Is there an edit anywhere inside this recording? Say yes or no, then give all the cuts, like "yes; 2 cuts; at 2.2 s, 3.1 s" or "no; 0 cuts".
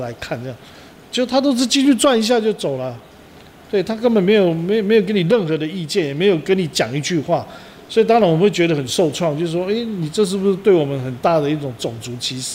no; 0 cuts